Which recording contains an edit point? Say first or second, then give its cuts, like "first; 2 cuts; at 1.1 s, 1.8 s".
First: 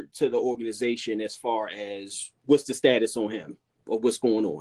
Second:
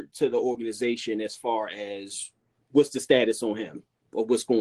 first; 1 cut; at 2.4 s